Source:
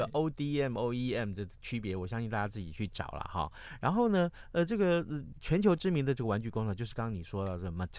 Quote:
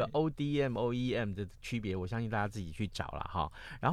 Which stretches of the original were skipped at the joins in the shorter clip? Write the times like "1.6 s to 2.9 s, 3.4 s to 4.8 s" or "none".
none